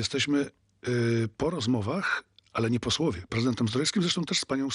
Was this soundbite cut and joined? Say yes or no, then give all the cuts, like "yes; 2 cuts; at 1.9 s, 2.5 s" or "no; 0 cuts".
yes; 1 cut; at 3.3 s